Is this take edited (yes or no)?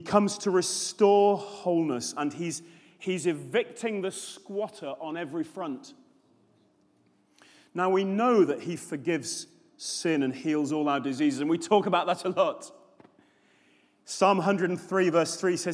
no